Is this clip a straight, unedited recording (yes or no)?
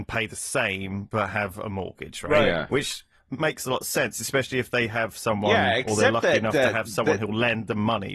yes